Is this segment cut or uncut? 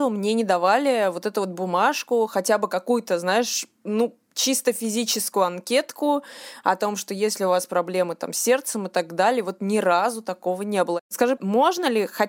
cut